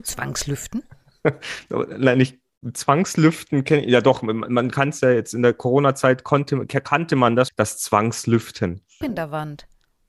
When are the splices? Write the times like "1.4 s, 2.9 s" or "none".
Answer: 7.5 s, 9.0 s